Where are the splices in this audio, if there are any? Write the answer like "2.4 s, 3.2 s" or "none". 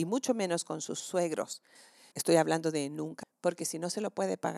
2.1 s, 3.2 s